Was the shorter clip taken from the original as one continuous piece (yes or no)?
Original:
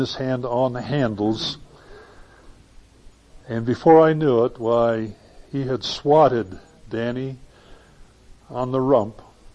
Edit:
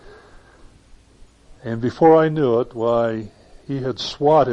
yes